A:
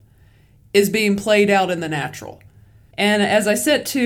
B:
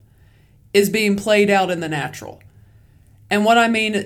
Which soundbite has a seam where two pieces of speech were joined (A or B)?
A